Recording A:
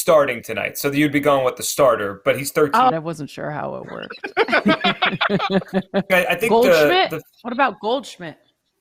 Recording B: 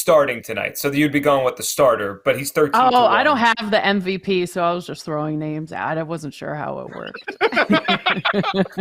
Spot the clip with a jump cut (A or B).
A